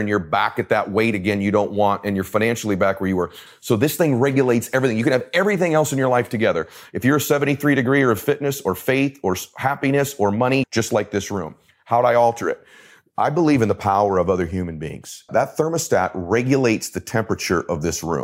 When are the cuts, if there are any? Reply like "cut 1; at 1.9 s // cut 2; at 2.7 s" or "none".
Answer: cut 1; at 3.5 s // cut 2; at 10.6 s // cut 3; at 15.3 s